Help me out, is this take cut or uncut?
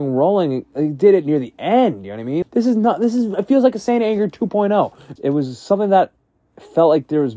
cut